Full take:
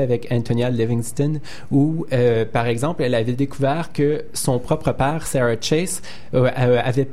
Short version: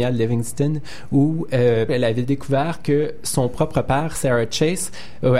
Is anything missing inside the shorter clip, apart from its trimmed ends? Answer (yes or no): yes